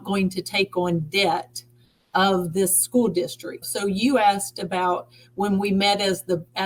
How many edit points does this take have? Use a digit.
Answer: 1